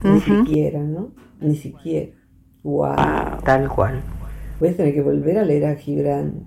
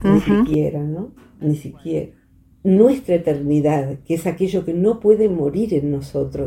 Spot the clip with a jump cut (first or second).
second